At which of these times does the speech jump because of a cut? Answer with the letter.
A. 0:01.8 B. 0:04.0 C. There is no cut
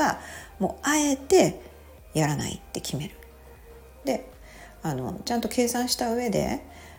B